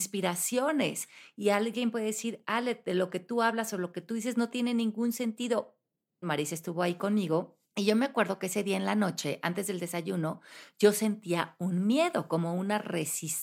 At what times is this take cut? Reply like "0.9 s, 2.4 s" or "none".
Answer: 6.2 s, 7.6 s